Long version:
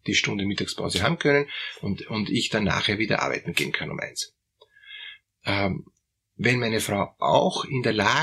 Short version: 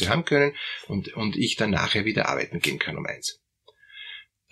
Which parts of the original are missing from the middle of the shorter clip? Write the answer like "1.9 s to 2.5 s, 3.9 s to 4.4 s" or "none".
none